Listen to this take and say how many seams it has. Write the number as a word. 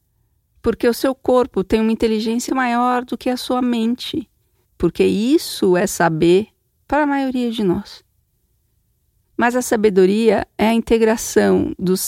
two